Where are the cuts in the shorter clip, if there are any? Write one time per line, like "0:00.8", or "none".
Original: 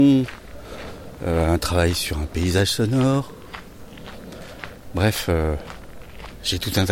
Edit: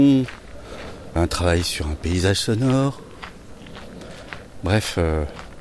0:01.2